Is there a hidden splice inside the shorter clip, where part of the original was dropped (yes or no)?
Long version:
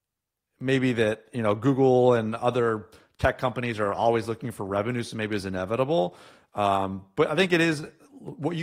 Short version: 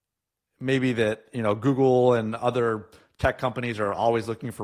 no